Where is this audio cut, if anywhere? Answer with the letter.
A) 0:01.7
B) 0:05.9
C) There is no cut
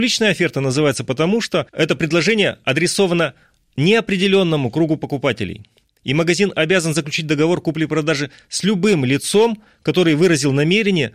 A